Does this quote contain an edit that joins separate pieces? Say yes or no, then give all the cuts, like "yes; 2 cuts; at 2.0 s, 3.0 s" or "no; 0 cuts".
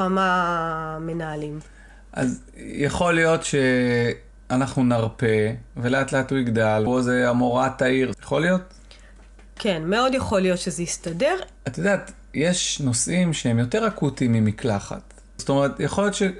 yes; 3 cuts; at 6.9 s, 8.1 s, 15.4 s